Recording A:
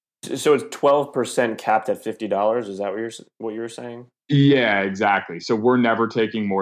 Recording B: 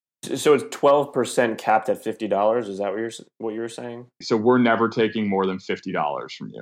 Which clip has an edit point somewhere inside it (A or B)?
B